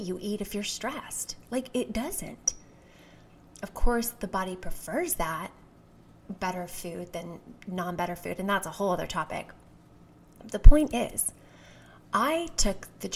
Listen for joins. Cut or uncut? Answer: uncut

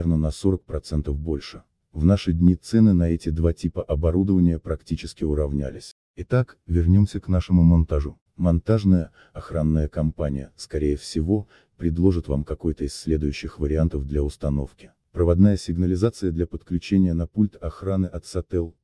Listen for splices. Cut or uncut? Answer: uncut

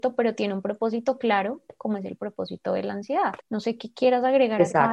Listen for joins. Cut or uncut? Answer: cut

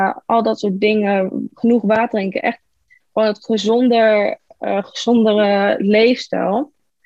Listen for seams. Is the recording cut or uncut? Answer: uncut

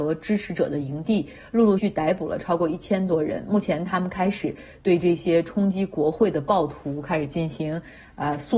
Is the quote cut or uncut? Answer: cut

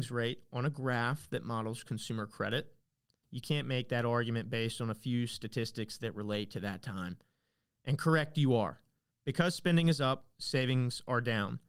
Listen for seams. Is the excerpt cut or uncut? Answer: cut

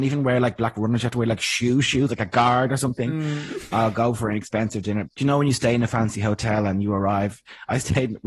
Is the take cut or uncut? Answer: cut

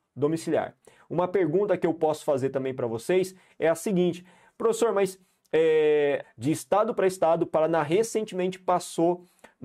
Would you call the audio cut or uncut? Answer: cut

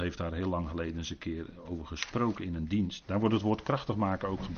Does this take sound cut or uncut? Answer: cut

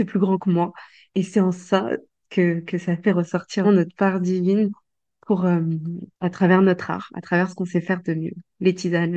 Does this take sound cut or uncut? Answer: cut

